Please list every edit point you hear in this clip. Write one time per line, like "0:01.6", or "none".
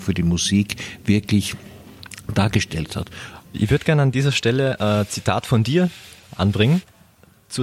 0:03.5